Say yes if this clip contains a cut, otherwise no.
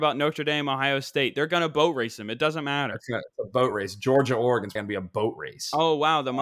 yes